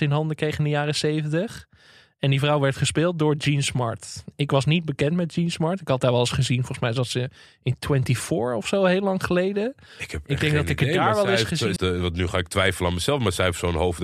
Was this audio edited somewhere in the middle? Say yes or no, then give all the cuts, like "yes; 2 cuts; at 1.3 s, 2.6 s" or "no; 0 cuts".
yes; 1 cut; at 11.8 s